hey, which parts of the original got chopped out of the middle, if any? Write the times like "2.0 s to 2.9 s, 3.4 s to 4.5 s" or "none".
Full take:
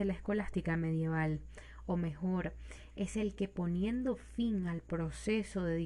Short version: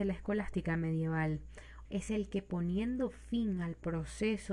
1.8 s to 2.9 s